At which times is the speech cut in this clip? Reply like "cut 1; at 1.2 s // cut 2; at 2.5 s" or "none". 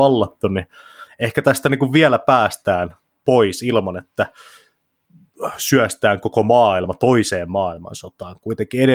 none